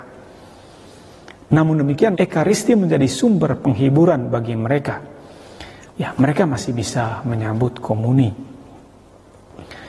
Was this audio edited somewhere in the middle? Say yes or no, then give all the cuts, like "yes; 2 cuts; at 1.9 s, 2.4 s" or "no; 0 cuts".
yes; 2 cuts; at 2.1 s, 5.9 s